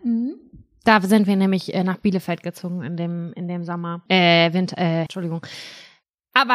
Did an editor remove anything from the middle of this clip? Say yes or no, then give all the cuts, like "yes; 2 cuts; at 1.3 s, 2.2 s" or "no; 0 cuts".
yes; 2 cuts; at 4.1 s, 5.1 s